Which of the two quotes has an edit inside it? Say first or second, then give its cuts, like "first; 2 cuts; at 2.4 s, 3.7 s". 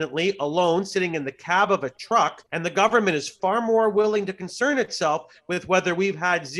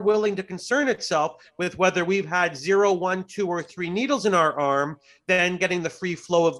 first; 1 cut; at 2.5 s